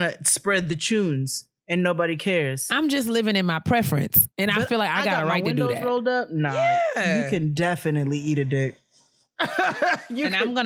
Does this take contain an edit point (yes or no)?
no